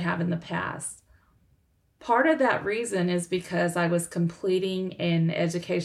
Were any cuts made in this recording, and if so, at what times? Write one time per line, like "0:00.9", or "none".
none